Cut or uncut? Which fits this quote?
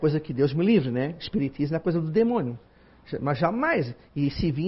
uncut